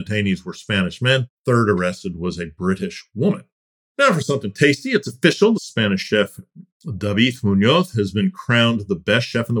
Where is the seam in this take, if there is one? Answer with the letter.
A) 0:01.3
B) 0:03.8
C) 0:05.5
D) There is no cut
C